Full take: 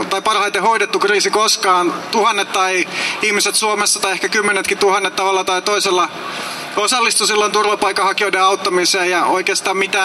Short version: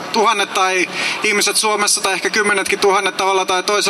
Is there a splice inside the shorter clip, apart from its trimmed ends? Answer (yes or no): no